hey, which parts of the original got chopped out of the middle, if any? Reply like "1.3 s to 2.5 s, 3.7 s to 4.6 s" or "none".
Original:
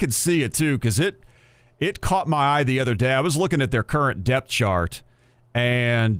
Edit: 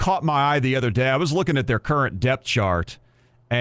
none